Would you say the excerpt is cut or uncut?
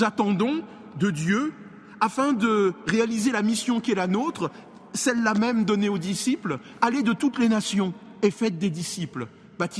uncut